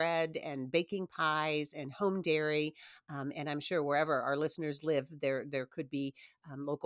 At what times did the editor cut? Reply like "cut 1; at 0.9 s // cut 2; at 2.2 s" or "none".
none